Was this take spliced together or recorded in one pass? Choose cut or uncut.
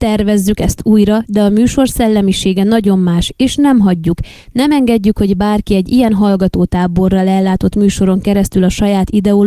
uncut